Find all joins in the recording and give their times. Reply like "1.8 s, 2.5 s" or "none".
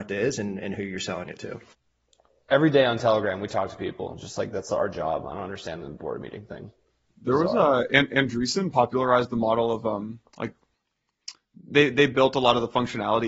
none